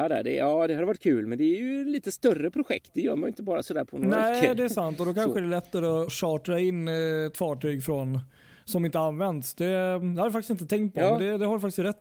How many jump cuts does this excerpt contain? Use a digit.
1